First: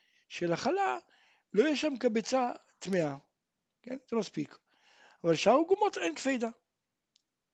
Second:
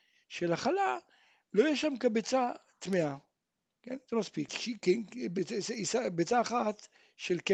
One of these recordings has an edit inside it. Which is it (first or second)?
second